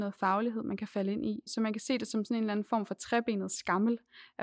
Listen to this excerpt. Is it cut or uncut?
uncut